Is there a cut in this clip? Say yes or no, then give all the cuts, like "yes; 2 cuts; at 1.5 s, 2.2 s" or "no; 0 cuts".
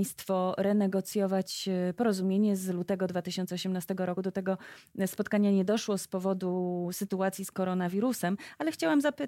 no; 0 cuts